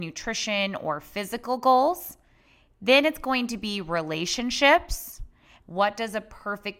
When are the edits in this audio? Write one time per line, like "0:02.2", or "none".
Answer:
0:05.6